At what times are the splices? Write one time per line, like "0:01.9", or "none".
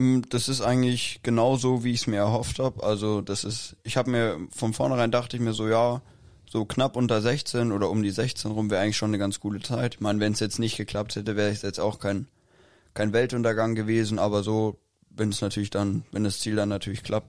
none